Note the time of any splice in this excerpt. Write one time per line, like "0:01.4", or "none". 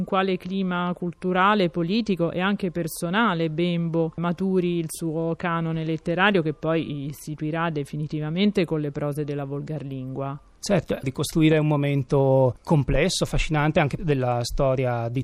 0:11.0
0:14.0